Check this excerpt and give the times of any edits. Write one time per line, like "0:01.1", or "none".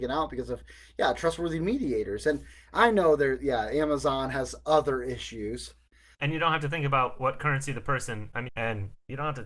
0:06.1
0:08.5